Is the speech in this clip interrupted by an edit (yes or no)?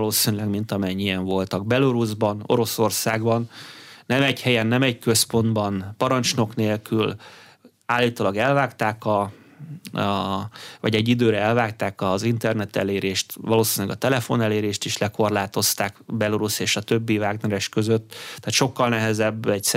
no